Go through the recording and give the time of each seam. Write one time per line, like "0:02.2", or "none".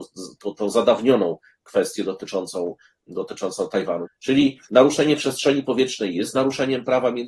0:04.0